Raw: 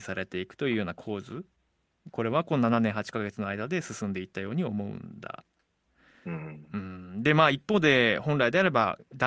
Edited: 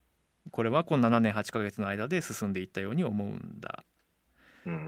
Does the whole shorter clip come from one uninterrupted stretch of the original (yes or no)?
yes